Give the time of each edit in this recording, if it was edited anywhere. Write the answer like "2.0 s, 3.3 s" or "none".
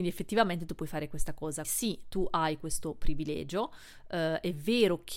1.6 s